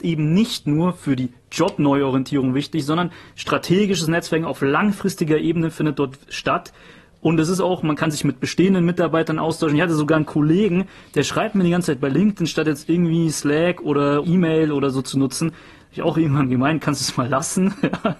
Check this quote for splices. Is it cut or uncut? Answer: cut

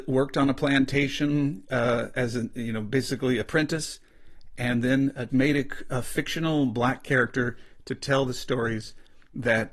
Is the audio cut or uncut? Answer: cut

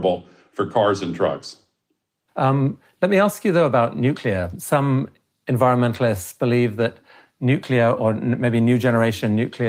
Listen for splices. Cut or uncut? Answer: cut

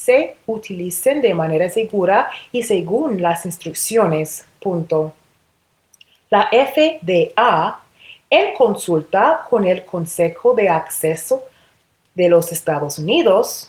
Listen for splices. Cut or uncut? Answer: uncut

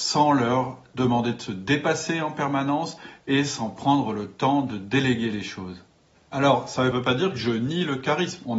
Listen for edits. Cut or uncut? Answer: cut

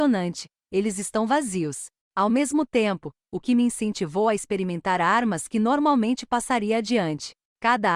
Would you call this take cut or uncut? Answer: cut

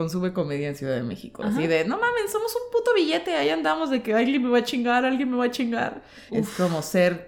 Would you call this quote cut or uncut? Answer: cut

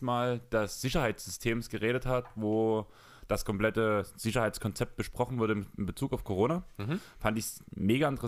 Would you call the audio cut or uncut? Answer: uncut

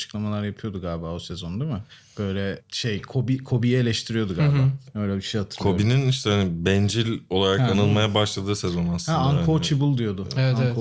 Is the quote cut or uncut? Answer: uncut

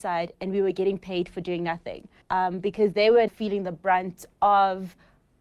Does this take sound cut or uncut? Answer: cut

